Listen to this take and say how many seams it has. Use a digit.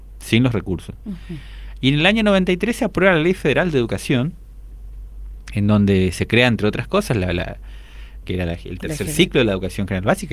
1